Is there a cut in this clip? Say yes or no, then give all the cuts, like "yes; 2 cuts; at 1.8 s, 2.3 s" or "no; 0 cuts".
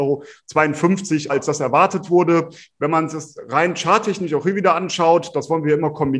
yes; 1 cut; at 1.3 s